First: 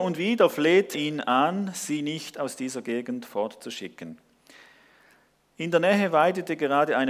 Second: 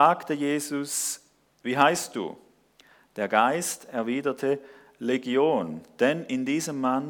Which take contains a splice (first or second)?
first